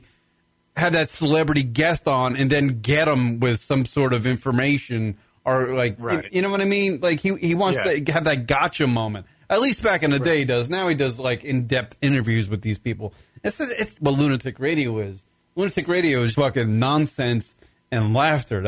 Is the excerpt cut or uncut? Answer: cut